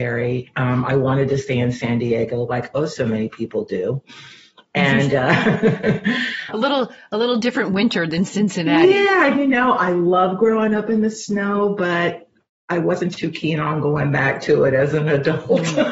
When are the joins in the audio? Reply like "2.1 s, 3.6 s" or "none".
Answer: 6.5 s